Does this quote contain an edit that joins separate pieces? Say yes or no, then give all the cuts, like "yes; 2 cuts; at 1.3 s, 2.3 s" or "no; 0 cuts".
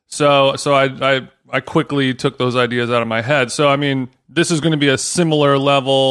no; 0 cuts